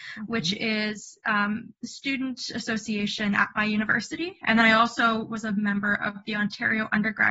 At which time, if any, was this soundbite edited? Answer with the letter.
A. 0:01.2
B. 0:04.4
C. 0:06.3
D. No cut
D